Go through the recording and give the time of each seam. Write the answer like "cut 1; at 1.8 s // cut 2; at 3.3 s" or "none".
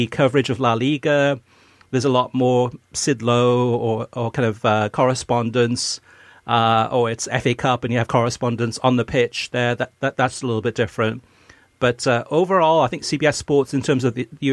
none